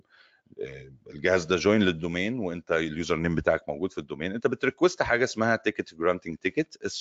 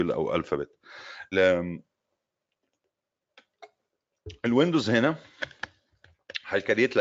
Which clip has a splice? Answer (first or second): second